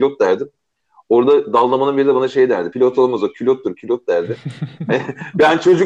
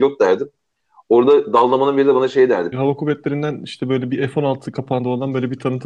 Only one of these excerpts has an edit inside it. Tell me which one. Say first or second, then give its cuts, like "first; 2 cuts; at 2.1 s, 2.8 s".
second; 1 cut; at 2.7 s